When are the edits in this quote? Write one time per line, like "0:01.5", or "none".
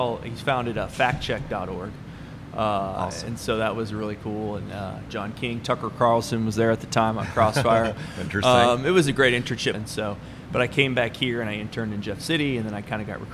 0:05.1
0:09.7